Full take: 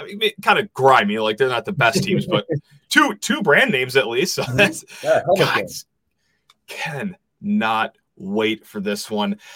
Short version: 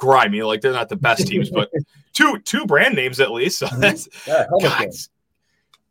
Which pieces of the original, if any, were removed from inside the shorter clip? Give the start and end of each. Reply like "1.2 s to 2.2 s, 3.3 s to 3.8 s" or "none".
none

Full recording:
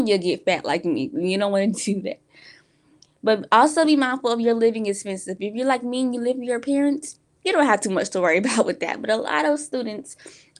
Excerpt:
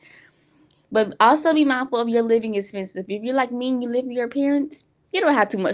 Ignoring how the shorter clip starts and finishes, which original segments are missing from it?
none

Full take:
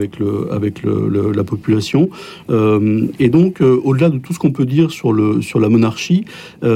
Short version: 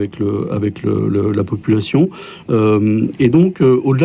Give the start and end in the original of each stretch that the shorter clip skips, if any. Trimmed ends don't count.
none

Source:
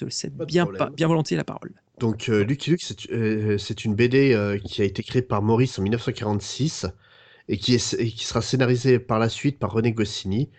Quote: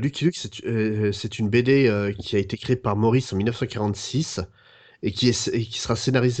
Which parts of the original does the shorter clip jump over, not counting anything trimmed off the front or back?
none

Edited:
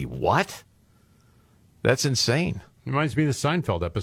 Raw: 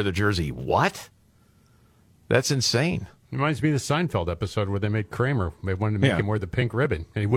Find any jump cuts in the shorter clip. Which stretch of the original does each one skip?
none

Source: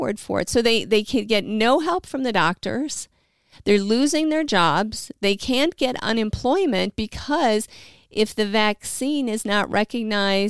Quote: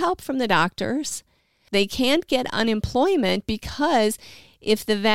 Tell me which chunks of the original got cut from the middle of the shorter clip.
3.5 s to 5.2 s

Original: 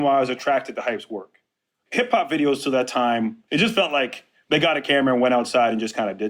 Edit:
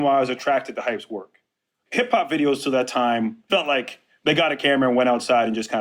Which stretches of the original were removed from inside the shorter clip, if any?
3.5 s to 3.7 s

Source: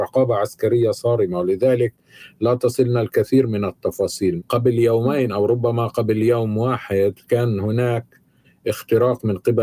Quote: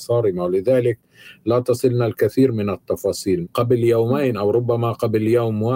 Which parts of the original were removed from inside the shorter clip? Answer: none

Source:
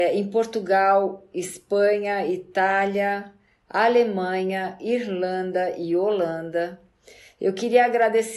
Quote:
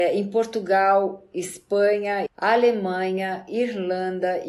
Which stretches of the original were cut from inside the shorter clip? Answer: 2.3 s to 3.6 s

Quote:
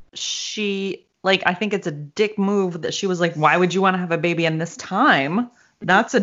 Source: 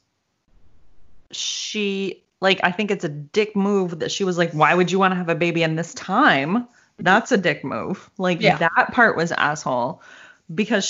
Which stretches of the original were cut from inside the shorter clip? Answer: none

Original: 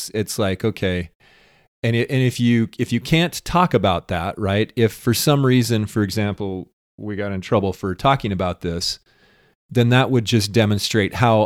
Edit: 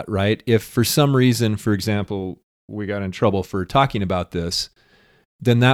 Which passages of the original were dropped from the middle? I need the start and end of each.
none

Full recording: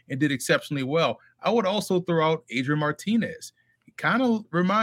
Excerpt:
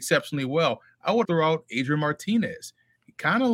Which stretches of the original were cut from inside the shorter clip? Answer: 1.6 s to 2.0 s

